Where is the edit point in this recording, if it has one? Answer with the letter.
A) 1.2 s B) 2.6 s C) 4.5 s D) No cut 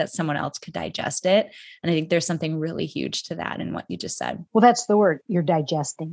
C